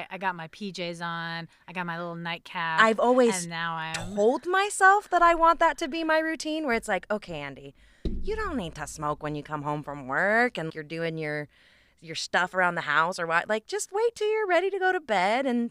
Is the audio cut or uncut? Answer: cut